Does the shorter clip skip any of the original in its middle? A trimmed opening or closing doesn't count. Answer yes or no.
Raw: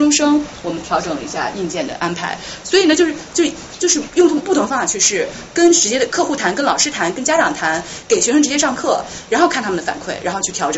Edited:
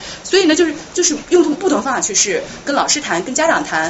yes